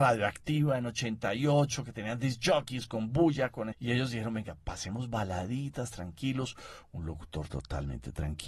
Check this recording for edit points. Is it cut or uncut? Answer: cut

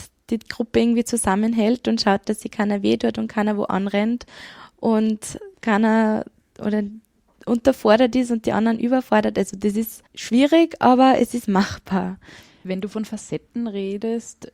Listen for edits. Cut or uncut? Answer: cut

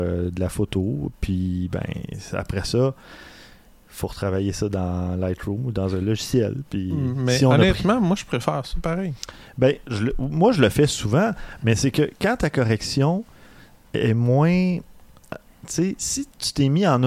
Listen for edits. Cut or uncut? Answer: uncut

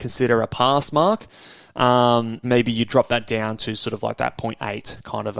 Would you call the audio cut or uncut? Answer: cut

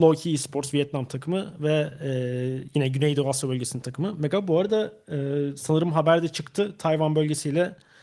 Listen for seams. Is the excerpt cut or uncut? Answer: uncut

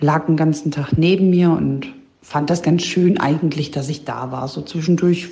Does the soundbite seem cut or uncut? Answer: uncut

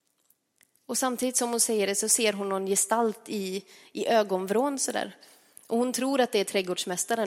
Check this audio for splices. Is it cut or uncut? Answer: uncut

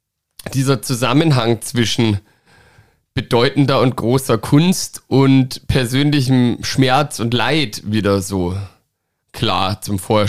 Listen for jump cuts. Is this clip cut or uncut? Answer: uncut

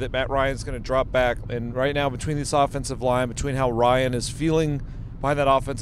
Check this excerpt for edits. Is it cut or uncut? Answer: cut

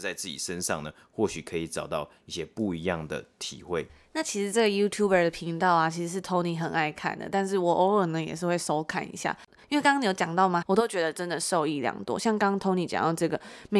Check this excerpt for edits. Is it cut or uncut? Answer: cut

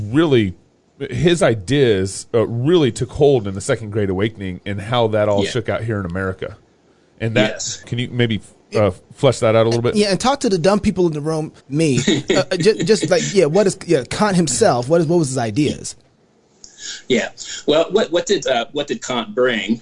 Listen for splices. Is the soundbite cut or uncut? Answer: cut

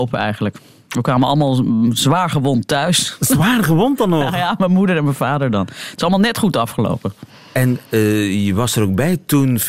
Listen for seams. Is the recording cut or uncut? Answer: uncut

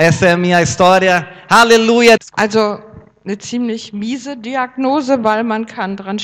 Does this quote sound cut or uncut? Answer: cut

